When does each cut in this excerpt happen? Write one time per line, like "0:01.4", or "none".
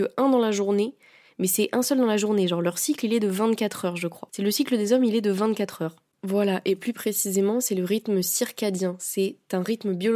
0:04.3